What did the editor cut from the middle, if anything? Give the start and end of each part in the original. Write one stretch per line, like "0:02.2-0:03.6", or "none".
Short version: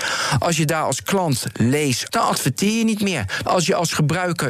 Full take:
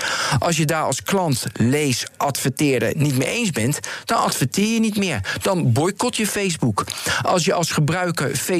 0:02.1-0:04.0
0:05.4-0:07.2